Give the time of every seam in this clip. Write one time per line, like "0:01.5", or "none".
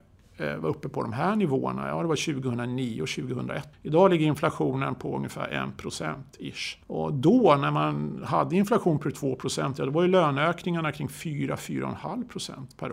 0:06.8